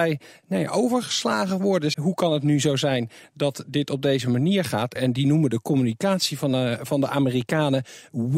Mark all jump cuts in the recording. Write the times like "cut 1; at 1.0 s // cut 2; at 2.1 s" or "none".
cut 1; at 1.9 s // cut 2; at 5.0 s